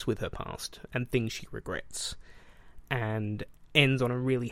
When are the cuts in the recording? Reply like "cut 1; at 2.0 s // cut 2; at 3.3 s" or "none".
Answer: none